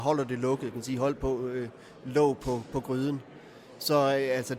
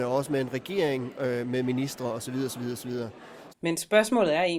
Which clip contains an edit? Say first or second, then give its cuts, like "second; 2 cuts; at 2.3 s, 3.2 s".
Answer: second; 1 cut; at 3.5 s